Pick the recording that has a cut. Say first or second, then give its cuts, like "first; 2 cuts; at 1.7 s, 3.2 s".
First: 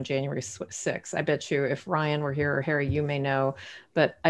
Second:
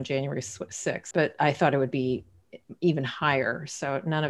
second; 1 cut; at 1.1 s